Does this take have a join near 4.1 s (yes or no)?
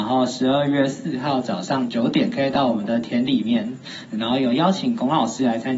yes